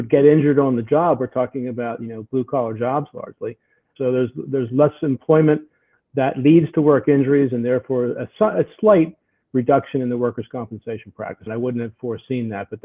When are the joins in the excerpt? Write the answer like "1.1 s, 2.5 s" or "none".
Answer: 4.0 s, 11.5 s